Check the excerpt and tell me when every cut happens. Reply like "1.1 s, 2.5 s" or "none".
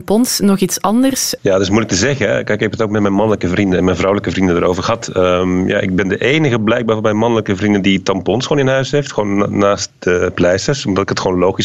1.4 s